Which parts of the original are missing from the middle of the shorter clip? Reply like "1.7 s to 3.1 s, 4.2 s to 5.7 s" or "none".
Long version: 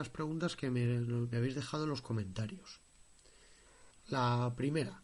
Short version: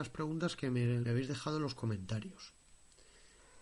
1.0 s to 1.3 s